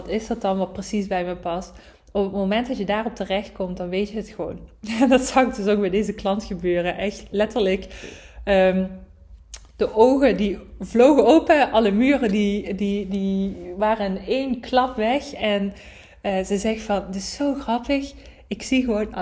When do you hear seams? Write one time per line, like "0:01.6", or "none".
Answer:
none